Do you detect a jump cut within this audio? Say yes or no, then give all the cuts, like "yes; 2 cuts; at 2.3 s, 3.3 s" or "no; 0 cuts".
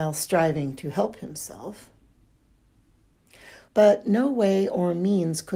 yes; 1 cut; at 3.7 s